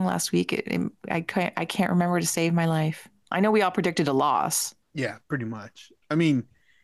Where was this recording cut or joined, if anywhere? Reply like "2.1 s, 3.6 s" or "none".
4.8 s